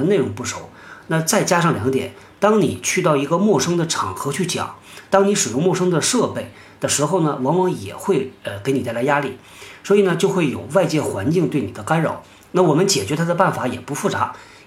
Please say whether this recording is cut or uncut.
uncut